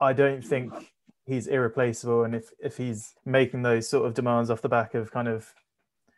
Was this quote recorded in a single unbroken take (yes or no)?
no